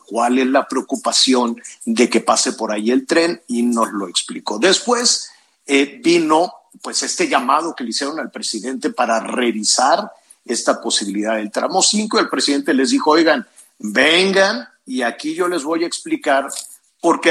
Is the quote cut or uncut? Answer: uncut